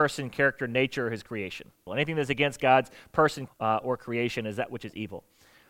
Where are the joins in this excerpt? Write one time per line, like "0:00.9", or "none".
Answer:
0:01.9
0:03.5